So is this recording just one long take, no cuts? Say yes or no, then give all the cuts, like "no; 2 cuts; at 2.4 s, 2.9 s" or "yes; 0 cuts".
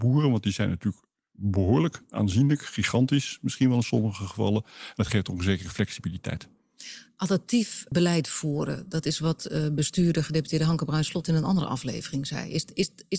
no; 1 cut; at 7.9 s